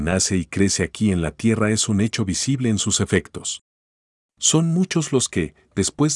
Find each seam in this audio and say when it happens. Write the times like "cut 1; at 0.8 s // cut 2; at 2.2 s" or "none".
cut 1; at 4.2 s